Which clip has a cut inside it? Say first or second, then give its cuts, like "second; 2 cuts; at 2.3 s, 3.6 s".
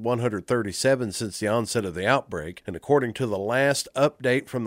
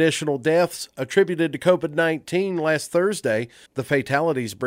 second; 1 cut; at 3.7 s